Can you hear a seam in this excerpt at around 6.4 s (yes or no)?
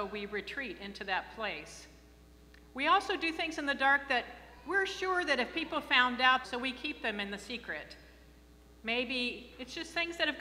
yes